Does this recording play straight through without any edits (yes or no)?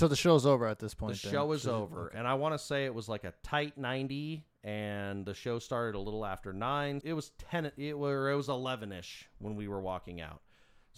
no